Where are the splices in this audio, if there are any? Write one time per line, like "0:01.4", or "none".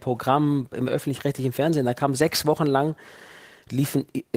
none